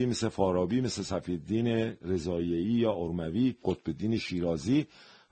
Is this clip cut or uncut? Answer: cut